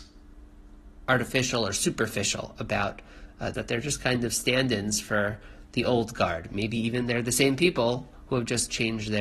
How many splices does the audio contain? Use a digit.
1